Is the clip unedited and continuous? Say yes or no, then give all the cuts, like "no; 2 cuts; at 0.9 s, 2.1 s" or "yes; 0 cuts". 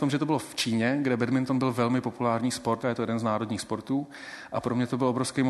no; 1 cut; at 2.8 s